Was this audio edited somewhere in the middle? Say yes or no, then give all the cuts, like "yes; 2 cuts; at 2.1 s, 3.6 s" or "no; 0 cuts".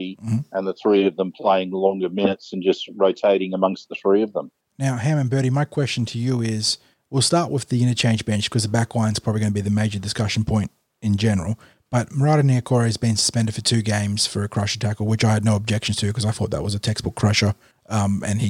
no; 0 cuts